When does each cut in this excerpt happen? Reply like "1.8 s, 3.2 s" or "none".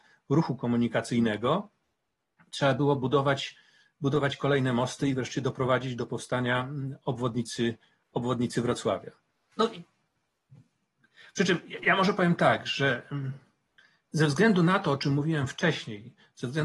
9.5 s